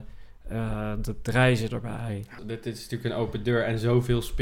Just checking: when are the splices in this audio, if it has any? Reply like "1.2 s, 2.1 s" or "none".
2.4 s